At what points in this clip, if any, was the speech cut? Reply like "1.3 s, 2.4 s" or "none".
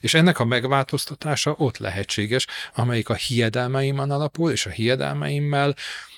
2.7 s